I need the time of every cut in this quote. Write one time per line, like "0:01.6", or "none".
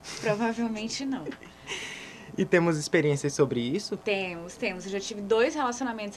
none